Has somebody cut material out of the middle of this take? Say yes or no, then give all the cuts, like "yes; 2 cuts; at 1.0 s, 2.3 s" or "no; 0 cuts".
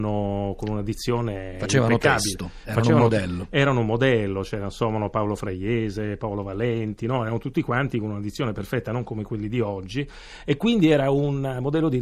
no; 0 cuts